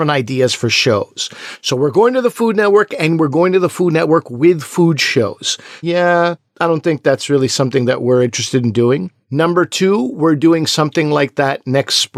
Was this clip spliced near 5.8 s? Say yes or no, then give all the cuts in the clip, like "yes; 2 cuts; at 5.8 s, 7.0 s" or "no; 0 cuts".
yes; 1 cut; at 5.8 s